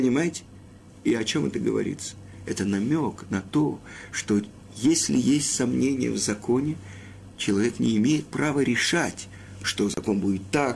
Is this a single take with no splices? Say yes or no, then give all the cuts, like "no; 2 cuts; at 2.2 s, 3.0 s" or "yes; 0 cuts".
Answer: yes; 0 cuts